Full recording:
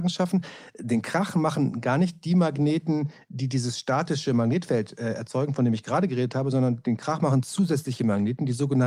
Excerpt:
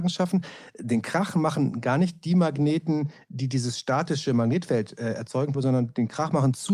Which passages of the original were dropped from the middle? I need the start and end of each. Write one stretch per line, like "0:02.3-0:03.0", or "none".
0:05.5-0:06.4